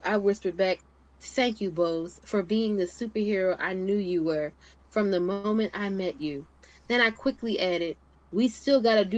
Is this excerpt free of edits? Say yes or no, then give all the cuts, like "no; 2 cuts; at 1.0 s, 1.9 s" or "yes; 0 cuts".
yes; 0 cuts